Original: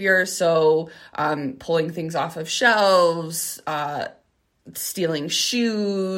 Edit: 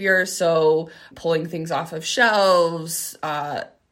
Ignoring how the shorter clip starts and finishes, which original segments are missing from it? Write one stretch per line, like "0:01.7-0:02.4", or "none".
0:01.1-0:01.5